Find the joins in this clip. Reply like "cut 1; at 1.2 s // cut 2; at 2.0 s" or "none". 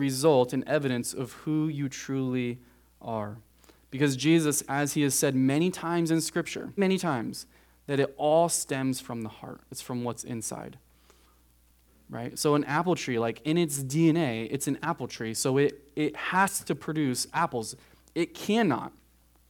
cut 1; at 6.8 s